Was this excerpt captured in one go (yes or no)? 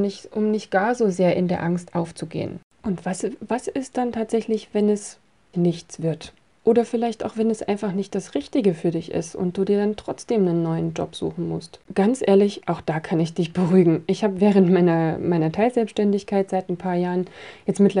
no